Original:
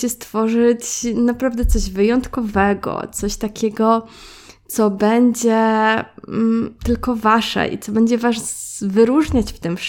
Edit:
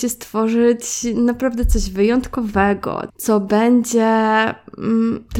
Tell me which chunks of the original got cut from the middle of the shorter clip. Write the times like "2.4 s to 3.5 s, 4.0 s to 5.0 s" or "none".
3.1 s to 4.6 s

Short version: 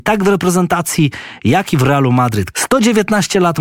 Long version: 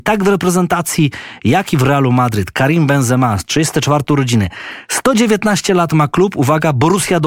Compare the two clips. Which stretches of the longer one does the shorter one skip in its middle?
2.5 s to 4.9 s

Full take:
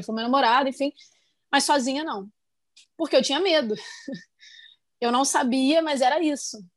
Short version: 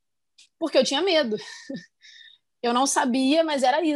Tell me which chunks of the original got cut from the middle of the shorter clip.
none

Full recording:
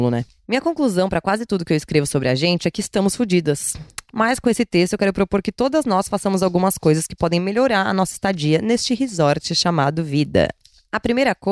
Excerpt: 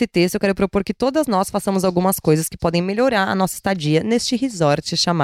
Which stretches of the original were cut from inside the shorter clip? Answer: none

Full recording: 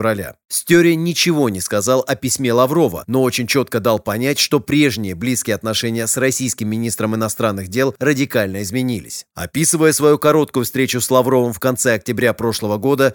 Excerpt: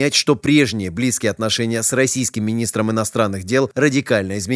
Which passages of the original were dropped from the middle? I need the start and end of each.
none

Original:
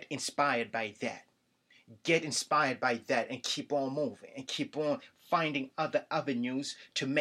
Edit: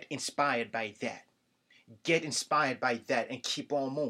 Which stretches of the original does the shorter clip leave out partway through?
none

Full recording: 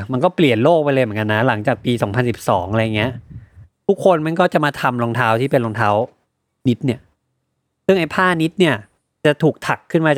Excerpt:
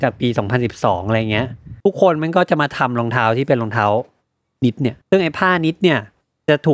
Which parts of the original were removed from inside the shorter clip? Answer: 3.4 s to 3.8 s, 7.0 s to 7.8 s

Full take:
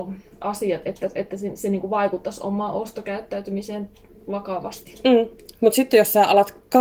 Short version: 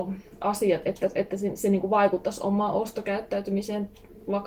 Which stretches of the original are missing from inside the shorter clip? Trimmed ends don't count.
none

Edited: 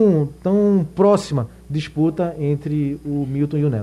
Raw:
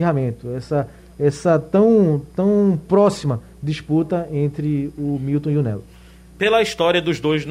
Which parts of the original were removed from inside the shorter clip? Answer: none

